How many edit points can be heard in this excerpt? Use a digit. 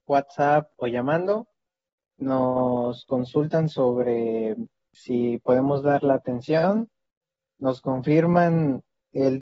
1